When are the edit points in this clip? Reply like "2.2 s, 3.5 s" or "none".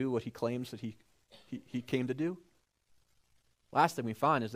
none